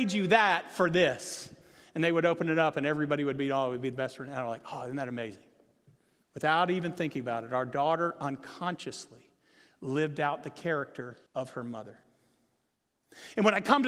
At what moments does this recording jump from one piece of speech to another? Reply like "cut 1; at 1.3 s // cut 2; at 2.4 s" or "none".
cut 1; at 6.2 s // cut 2; at 11.3 s